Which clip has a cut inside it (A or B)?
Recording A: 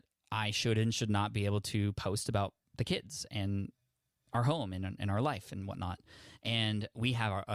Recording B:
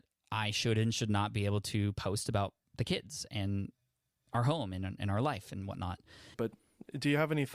B